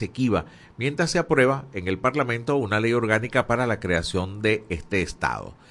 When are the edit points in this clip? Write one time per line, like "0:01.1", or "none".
none